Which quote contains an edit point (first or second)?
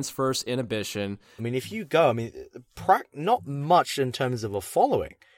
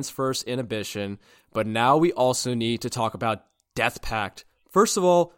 first